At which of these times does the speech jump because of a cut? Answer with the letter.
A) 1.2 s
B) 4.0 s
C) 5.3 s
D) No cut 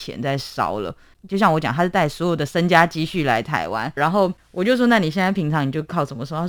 B